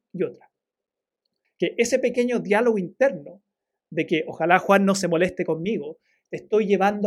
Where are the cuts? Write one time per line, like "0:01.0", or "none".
0:01.4